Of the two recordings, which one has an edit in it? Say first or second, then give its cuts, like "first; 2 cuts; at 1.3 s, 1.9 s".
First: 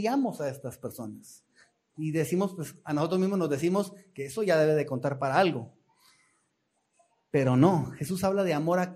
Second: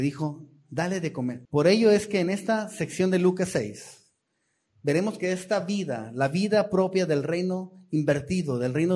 second; 1 cut; at 1.4 s